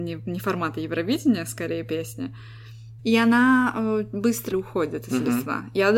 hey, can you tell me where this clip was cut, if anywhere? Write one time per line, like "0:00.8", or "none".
0:03.0
0:04.5

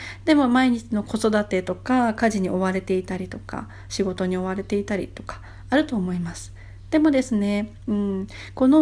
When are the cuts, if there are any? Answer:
none

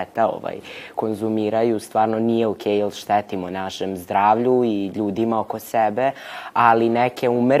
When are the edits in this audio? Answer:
none

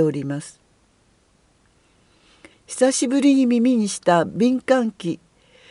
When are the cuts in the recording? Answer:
0:02.5

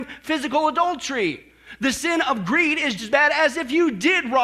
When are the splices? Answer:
0:03.0

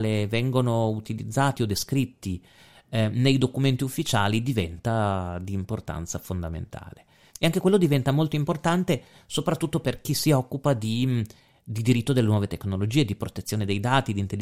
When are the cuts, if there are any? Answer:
0:07.3

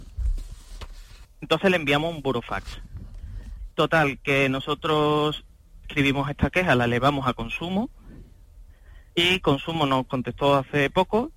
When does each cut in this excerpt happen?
0:01.2
0:03.7
0:05.8

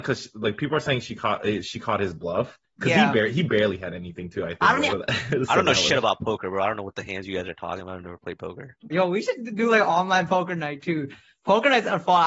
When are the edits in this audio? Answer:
0:04.9
0:08.9

